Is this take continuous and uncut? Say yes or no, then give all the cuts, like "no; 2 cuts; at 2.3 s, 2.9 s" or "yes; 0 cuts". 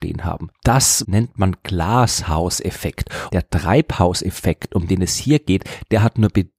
no; 2 cuts; at 1.0 s, 3.3 s